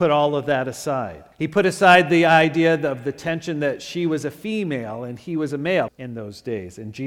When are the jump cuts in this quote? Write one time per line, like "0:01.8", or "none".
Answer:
0:01.3
0:05.9

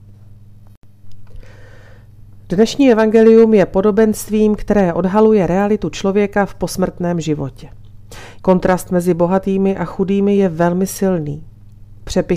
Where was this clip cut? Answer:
0:08.4

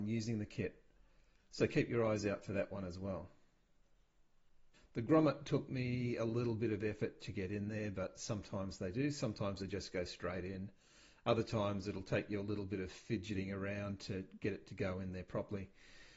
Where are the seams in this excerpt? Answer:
0:04.7

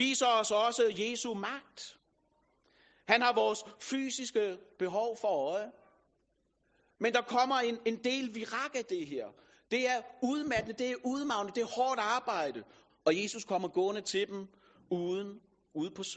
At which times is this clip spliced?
0:12.9

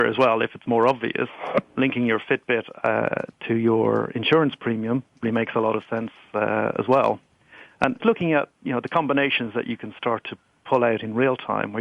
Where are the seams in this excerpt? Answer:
0:05.2
0:08.0

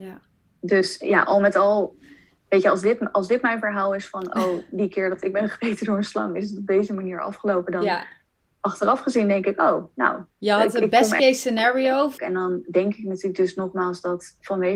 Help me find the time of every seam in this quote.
0:10.3
0:12.2

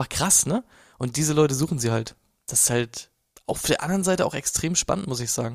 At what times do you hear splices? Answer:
none

